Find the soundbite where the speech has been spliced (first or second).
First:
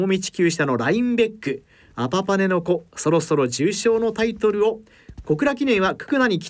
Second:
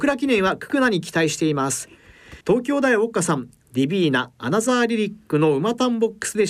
second